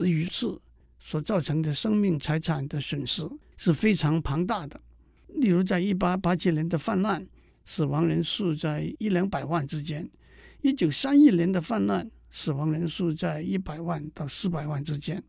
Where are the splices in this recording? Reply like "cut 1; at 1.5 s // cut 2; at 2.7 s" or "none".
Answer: none